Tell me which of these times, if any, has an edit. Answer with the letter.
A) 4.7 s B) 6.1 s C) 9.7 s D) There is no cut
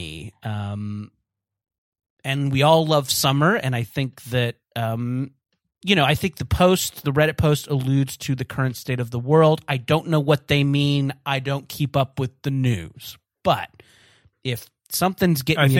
D